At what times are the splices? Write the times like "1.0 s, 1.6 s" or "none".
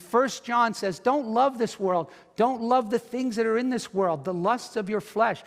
none